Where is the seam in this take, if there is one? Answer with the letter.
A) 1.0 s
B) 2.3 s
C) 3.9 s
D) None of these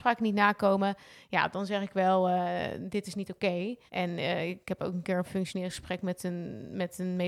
C